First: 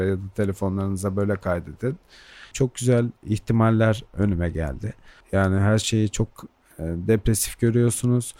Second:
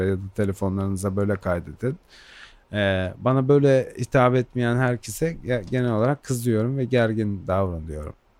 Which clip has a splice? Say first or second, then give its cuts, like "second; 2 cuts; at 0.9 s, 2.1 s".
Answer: first; 2 cuts; at 2.5 s, 5.2 s